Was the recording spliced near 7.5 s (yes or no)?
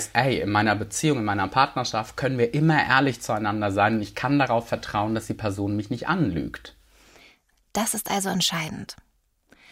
yes